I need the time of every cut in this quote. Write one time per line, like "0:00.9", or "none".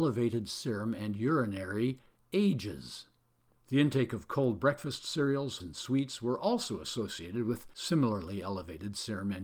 0:05.6

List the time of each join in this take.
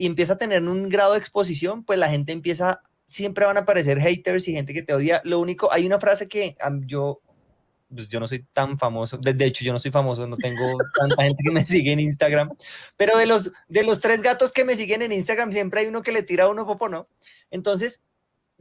none

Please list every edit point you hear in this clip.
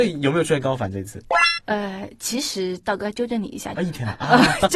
0:01.6
0:03.8

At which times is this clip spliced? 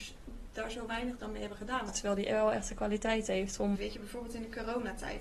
0:01.9
0:03.7

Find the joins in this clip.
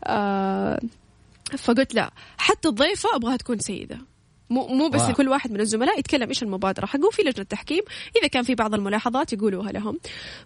0:05.1

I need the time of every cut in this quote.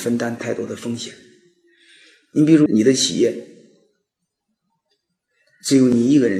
0:02.7

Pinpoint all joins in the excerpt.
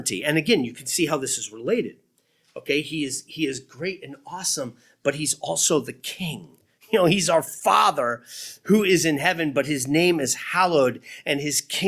none

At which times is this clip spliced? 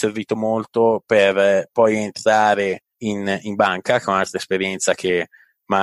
0:02.9

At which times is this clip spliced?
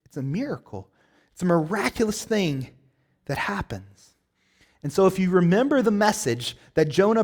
none

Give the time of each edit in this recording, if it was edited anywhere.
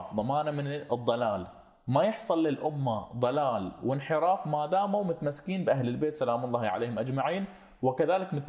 none

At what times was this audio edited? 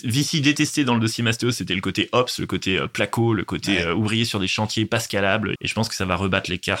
0:05.6

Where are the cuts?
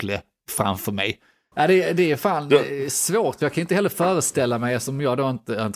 0:01.5

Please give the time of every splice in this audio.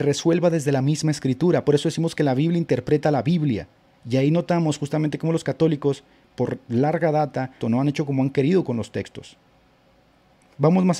0:03.9
0:06.2
0:07.6

